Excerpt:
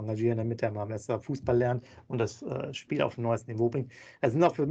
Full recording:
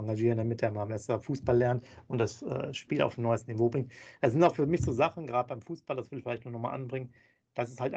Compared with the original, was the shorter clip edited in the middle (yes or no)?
no